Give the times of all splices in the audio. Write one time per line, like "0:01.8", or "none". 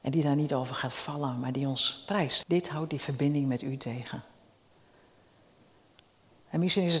0:02.4